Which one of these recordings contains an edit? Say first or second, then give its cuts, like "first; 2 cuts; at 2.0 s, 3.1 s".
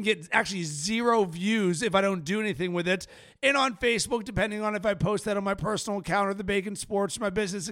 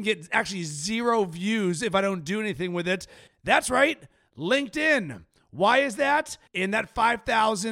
second; 2 cuts; at 3.3 s, 6.5 s